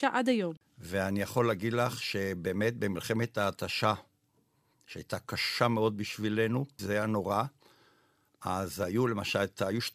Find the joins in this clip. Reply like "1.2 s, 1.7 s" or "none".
6.8 s